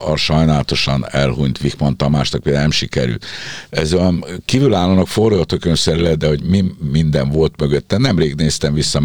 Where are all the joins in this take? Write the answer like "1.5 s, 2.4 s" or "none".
3.7 s